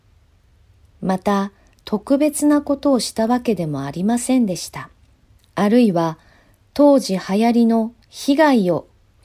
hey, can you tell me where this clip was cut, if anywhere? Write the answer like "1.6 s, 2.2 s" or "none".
5.4 s, 8.0 s

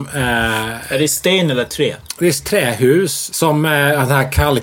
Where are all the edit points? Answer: 3.3 s

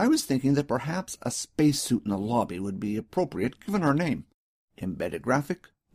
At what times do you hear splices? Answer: 4.6 s

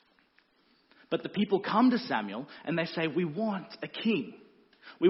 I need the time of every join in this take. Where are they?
none

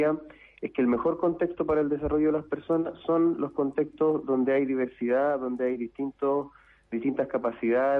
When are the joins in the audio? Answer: none

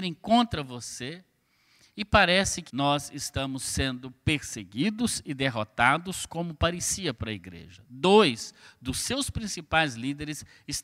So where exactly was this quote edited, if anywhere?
2.7 s

